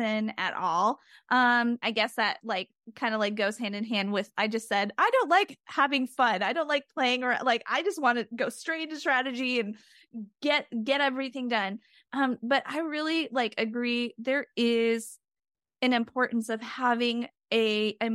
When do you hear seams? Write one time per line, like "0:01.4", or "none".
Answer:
0:01.8